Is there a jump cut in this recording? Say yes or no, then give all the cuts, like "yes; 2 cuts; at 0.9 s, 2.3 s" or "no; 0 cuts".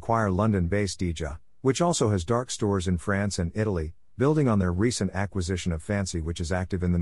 no; 0 cuts